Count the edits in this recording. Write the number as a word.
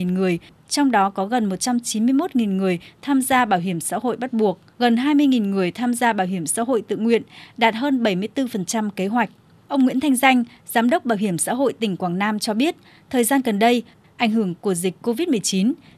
two